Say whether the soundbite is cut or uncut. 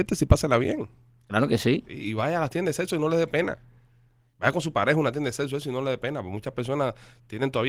uncut